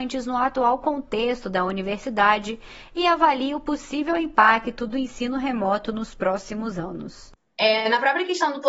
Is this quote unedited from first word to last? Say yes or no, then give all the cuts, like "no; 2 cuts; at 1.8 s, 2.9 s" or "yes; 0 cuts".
yes; 0 cuts